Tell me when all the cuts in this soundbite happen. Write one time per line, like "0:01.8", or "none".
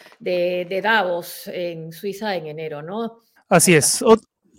0:03.4